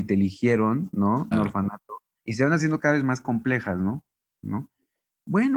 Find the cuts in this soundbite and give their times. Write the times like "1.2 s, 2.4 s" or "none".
1.3 s, 4.4 s